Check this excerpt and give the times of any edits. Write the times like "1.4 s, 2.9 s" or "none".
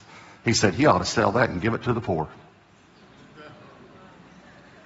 none